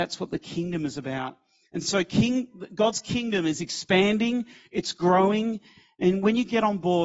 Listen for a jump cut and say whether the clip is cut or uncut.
uncut